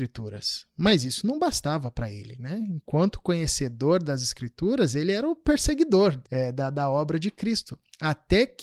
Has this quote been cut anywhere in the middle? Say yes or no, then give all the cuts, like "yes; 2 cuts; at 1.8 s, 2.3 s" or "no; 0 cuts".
yes; 1 cut; at 6.3 s